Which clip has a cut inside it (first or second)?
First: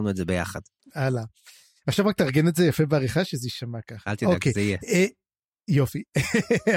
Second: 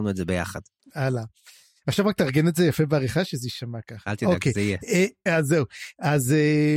second